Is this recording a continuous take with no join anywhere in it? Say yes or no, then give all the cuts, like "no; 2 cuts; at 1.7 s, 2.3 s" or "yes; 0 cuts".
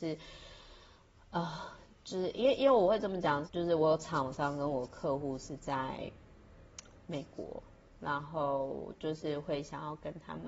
no; 1 cut; at 3.5 s